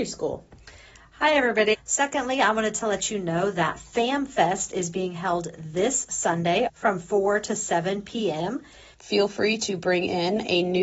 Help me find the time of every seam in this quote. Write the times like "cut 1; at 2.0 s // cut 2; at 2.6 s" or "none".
cut 1; at 1.7 s // cut 2; at 6.7 s // cut 3; at 8.9 s

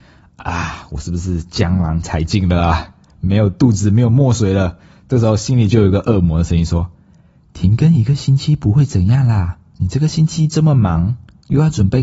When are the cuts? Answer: none

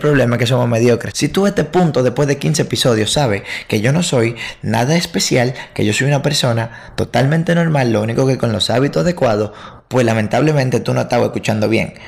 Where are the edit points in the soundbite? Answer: cut 1; at 1.1 s

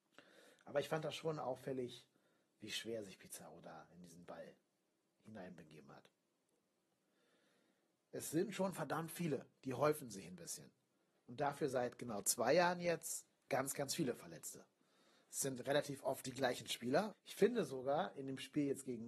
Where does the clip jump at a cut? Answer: cut 1; at 7.9 s // cut 2; at 11.2 s // cut 3; at 17.1 s

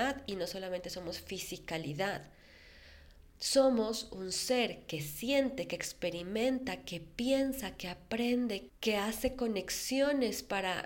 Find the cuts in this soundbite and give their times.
cut 1; at 8.7 s

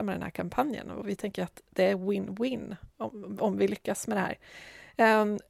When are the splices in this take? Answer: none

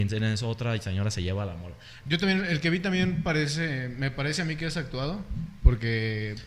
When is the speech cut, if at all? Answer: cut 1; at 2.0 s

